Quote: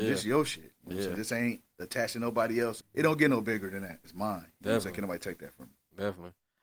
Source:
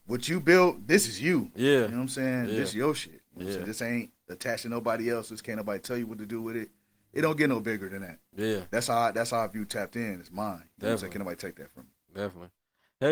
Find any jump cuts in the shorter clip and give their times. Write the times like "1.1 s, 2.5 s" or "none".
2.8 s, 4.0 s

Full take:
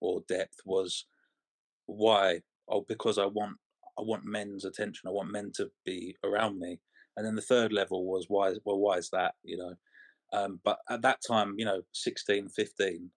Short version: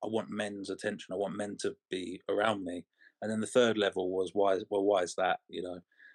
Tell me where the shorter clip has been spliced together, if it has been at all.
none

